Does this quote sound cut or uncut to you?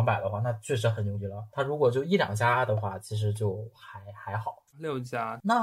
cut